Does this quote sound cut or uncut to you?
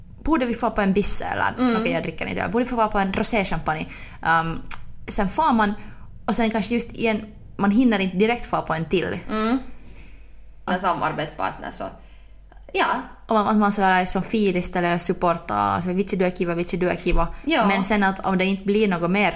cut